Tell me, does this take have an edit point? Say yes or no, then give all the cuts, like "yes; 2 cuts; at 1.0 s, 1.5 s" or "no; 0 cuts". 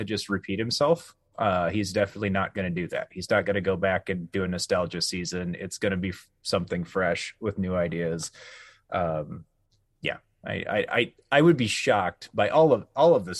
no; 0 cuts